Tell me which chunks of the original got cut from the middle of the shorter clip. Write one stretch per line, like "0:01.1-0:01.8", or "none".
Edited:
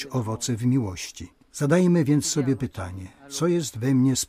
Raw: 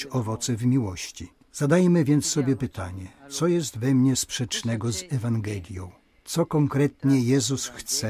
none